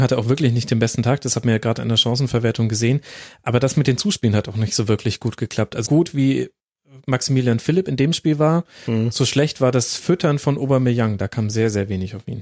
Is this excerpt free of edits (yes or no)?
no